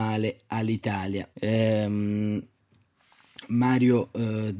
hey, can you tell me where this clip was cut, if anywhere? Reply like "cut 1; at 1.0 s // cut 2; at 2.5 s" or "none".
cut 1; at 1.3 s